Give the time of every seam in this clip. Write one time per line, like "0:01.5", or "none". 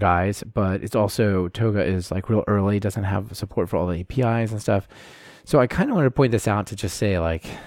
none